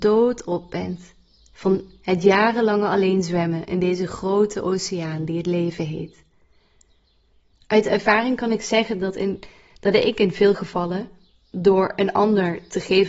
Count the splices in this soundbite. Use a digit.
0